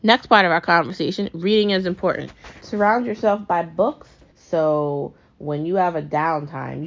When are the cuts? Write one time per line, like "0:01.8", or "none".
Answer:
0:02.6
0:04.3